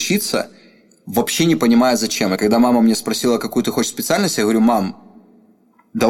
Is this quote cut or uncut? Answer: uncut